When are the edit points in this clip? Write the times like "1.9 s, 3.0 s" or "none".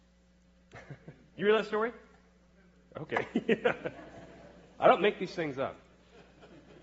none